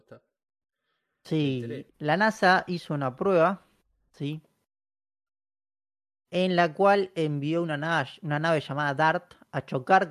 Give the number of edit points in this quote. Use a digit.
1